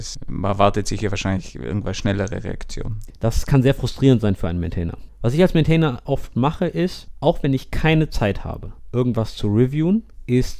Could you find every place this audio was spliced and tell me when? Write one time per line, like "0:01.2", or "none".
0:03.1

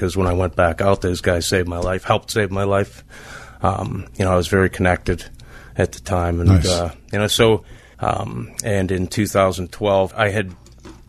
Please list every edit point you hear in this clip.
0:07.9
0:10.1

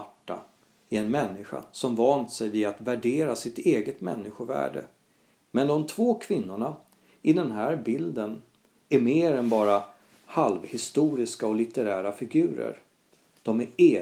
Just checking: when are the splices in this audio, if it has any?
0:05.3

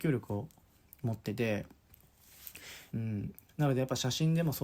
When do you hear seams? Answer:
0:02.9

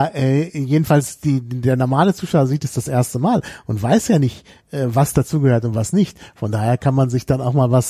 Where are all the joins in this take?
none

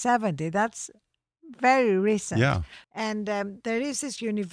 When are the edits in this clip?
0:02.8

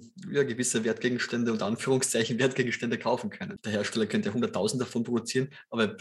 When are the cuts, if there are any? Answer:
0:03.6

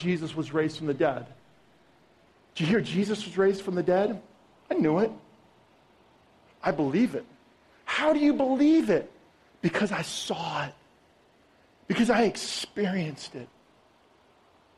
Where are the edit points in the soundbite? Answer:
0:06.5

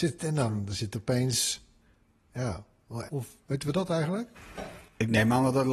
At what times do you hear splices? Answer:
0:03.1

